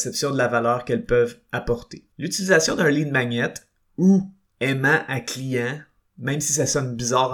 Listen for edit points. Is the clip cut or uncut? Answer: cut